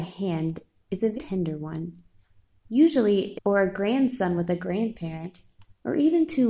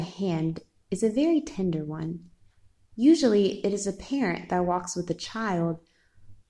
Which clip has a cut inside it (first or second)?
first